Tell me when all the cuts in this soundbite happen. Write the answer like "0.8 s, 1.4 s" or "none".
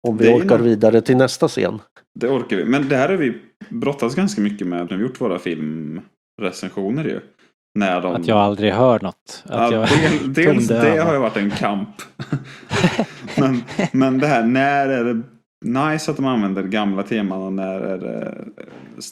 4.9 s